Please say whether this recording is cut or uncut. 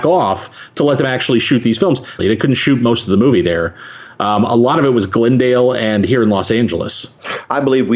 cut